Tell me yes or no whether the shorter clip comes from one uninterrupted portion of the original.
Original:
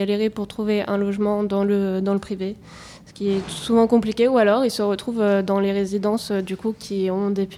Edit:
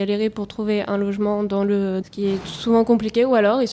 no